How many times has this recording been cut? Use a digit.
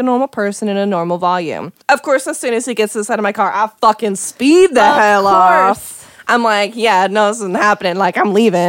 1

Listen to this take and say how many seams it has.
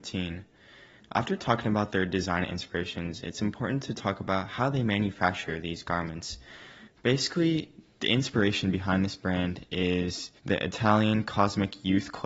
3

